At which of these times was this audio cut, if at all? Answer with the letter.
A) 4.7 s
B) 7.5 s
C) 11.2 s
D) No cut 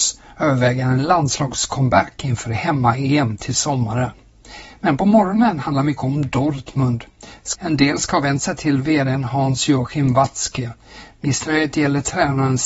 B